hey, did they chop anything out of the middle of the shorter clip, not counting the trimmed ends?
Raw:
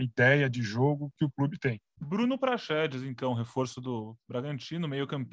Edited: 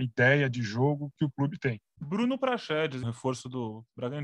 yes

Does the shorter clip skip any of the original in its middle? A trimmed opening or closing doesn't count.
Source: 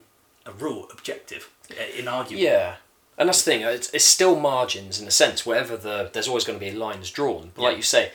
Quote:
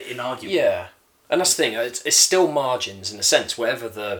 no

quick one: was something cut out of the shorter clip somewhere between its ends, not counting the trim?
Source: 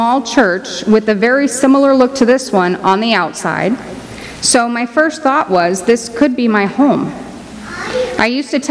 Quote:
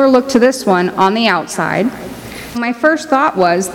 yes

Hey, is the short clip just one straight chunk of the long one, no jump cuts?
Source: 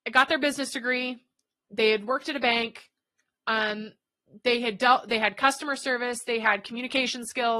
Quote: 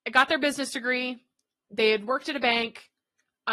yes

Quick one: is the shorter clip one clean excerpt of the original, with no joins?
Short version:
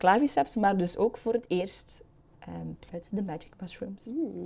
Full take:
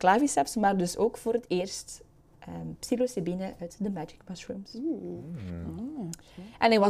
no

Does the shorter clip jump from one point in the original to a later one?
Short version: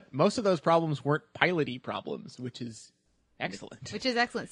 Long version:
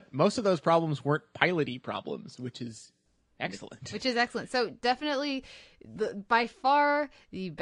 no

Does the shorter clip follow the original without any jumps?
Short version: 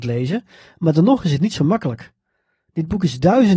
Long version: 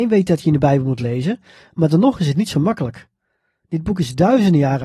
yes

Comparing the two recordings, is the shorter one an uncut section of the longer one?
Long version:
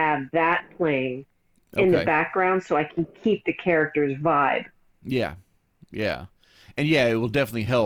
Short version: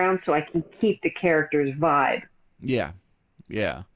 yes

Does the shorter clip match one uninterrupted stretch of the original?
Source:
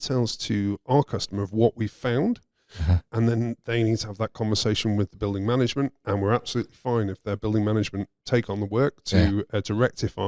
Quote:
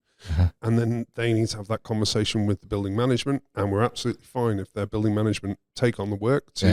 yes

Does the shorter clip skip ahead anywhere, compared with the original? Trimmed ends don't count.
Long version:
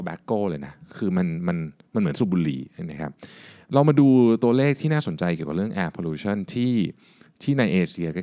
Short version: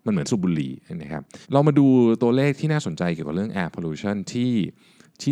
yes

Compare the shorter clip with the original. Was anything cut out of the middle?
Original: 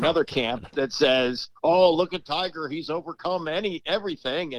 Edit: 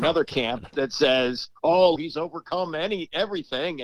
yes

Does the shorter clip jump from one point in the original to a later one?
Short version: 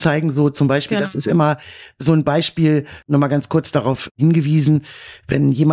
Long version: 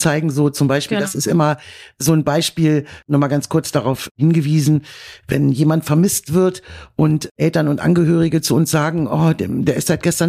no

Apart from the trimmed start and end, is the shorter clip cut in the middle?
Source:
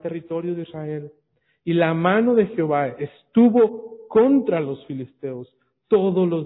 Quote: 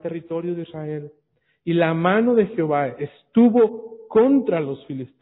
no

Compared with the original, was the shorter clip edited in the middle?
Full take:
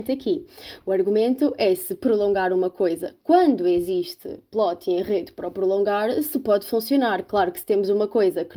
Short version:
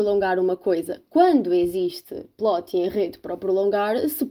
no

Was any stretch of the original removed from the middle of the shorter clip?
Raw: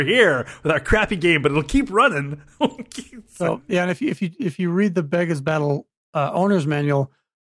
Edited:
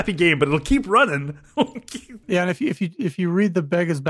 yes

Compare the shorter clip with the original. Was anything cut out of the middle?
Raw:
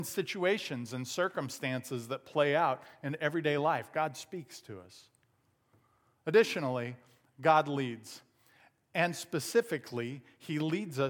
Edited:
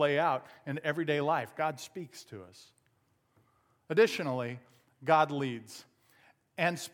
no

